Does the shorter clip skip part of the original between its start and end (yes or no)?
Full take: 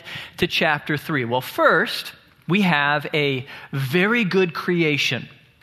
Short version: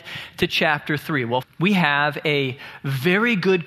yes